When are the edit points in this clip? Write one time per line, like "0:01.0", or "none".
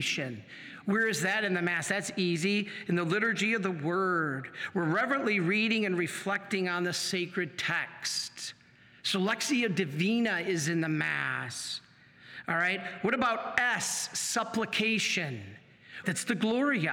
0:16.0